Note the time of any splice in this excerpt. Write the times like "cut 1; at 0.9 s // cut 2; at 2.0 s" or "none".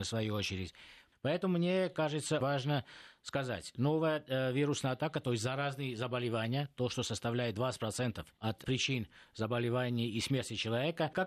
cut 1; at 2.4 s